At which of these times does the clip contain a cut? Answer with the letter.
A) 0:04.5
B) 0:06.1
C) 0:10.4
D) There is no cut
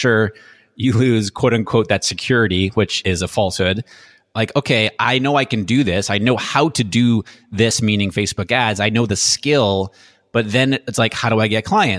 D